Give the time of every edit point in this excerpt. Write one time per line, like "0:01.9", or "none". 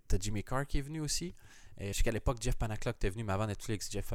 0:01.9